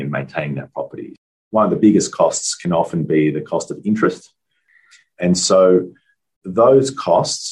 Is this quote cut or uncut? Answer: uncut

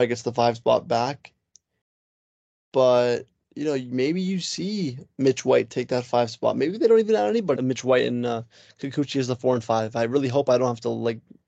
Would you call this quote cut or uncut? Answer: cut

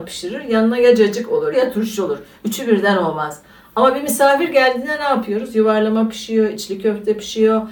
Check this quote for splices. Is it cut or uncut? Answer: cut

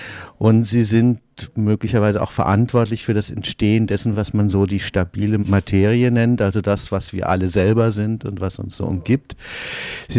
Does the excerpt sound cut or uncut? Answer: uncut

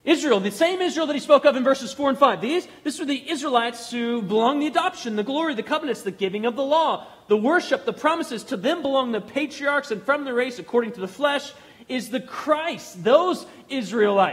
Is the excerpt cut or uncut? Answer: uncut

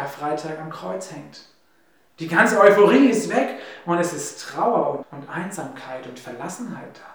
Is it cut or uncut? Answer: cut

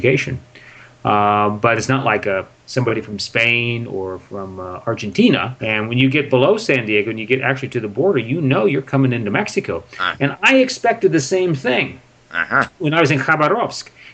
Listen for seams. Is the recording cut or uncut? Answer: cut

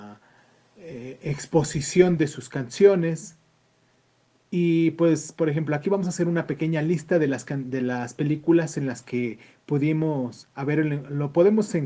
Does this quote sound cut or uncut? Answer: uncut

